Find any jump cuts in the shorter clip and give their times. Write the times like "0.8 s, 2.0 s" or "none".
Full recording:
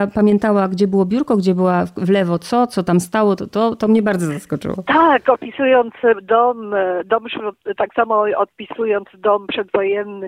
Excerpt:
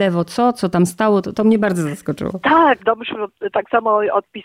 1.3 s, 2.8 s